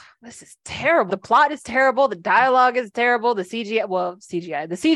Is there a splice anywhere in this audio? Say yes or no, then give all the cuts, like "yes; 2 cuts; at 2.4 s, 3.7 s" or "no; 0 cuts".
yes; 1 cut; at 1.1 s